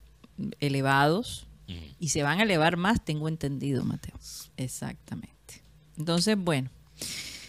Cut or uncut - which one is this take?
cut